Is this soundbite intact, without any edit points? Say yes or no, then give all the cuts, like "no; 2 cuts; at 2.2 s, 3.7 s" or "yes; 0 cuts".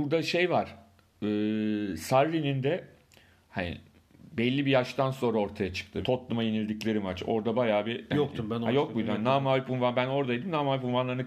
no; 1 cut; at 6.0 s